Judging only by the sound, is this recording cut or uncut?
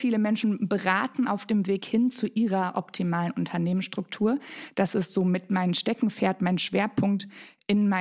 uncut